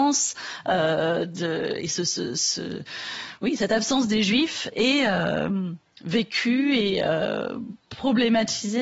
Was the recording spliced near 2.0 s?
no; 1 cut; at 7.8 s

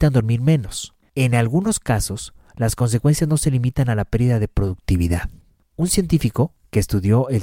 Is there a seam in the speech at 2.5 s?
no; 2 cuts; at 1.0 s, 5.6 s

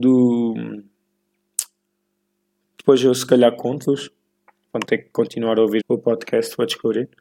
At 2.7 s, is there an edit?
yes; 3 cuts; at 2.7 s, 4.7 s, 5.8 s

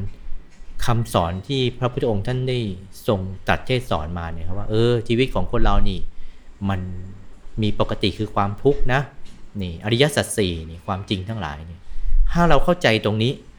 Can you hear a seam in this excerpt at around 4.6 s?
no; 0 cuts

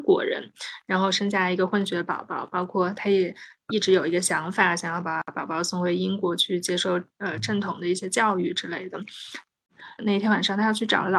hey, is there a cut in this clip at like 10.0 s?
yes; 1 cut; at 10.0 s

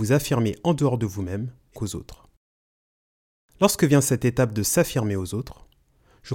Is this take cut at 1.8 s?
yes; 1 cut; at 1.8 s

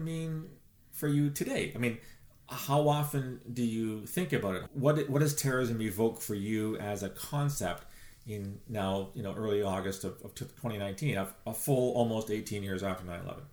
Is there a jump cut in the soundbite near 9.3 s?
no; 1 cut; at 4.7 s

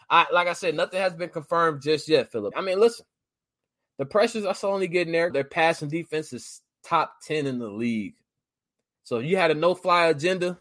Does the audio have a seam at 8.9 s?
no; 2 cuts; at 2.5 s, 5.3 s

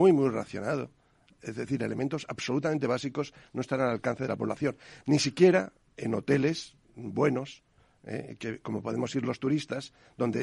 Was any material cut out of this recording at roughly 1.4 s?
no; 0 cuts

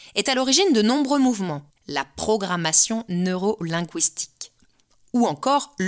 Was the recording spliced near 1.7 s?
yes; 1 cut; at 1.7 s

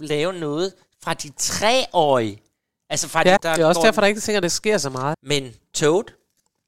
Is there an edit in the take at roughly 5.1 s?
yes; 2 cuts; at 3.4 s, 5.1 s

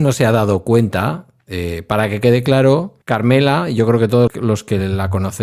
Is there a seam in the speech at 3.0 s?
yes; 2 cuts; at 3.0 s, 4.3 s

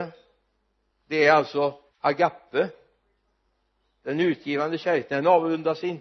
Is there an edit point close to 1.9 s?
yes; 1 cut; at 1.9 s

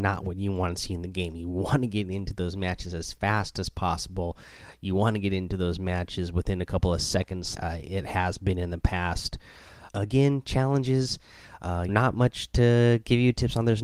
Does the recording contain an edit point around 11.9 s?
yes; 3 cuts; at 7.5 s, 9.9 s, 11.9 s

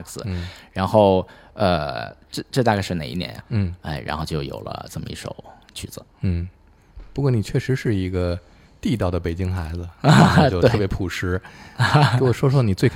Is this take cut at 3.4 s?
yes; 1 cut; at 3.4 s

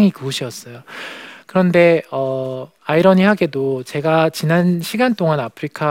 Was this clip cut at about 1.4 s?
yes; 2 cuts; at 1.4 s, 2.8 s

